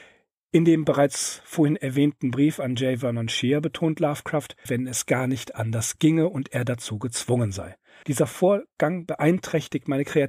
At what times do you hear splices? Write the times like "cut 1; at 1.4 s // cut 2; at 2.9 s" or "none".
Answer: cut 1; at 4.7 s // cut 2; at 8.0 s

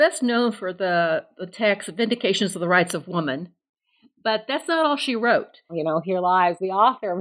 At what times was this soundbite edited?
cut 1; at 5.7 s

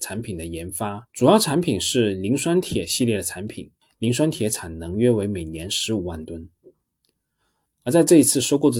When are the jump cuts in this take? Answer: cut 1; at 1.1 s

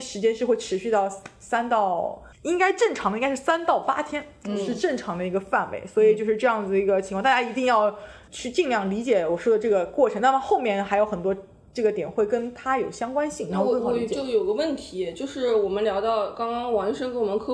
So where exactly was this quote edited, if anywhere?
cut 1; at 2.3 s

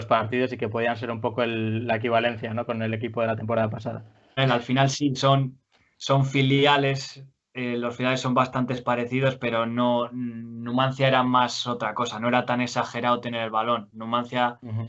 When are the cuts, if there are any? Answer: cut 1; at 4.4 s

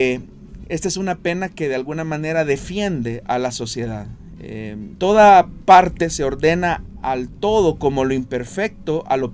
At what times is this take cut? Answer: cut 1; at 5.0 s

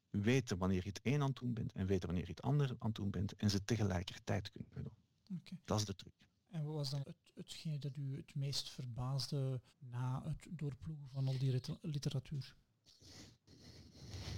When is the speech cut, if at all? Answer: cut 1; at 7.0 s // cut 2; at 9.7 s

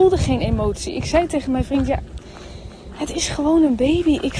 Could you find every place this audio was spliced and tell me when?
none

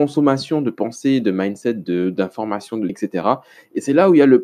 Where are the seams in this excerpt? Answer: cut 1; at 2.9 s

